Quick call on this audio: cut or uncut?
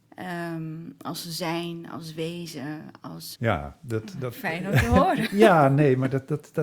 cut